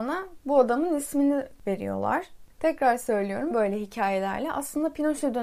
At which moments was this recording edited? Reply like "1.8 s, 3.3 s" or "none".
3.5 s

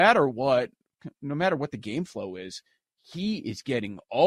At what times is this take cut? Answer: none

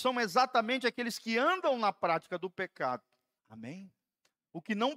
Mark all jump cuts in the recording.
3.4 s

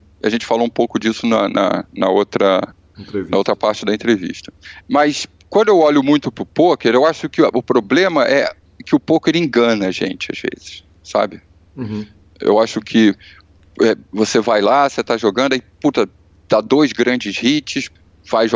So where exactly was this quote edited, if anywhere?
none

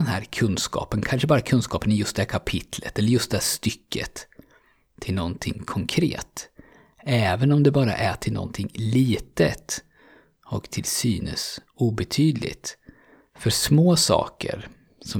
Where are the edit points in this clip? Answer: none

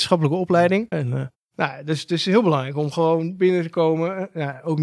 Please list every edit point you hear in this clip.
0.9 s

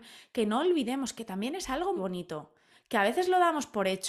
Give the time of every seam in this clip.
2.0 s

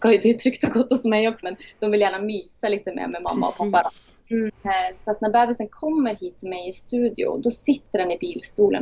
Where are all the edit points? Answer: 1.4 s, 4.5 s

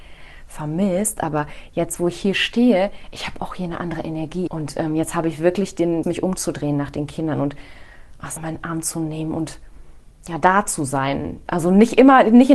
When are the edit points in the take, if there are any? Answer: 4.5 s, 6.0 s, 8.4 s

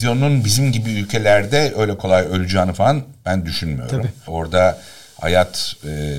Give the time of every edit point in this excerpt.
2.0 s, 4.3 s

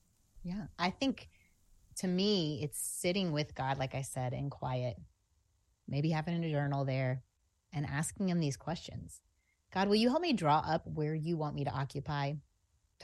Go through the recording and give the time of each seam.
none

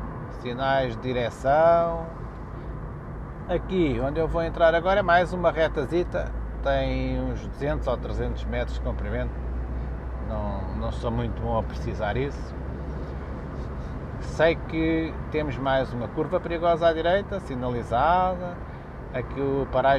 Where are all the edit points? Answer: 3.5 s

